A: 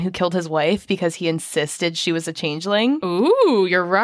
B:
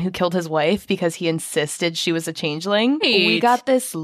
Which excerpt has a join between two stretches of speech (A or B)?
B